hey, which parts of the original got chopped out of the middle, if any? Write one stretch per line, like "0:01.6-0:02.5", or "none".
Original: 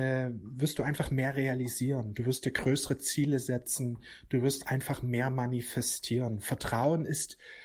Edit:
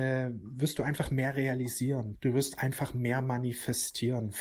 0:02.1-0:04.2